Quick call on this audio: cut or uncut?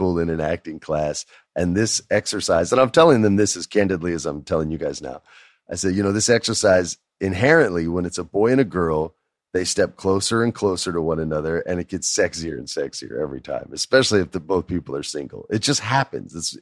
uncut